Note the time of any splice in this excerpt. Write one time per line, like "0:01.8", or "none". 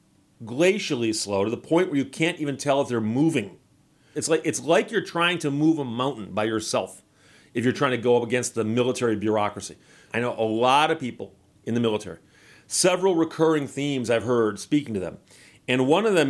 0:04.1
0:10.1